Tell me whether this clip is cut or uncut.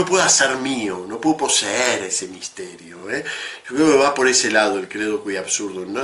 uncut